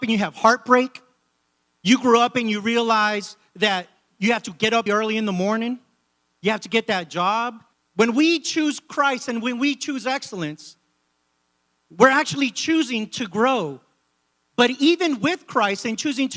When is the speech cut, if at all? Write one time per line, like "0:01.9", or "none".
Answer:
0:04.9
0:07.7